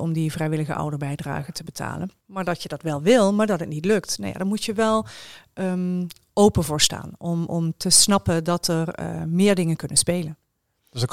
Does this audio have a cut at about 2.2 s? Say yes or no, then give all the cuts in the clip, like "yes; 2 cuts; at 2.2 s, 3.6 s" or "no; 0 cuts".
yes; 1 cut; at 2.2 s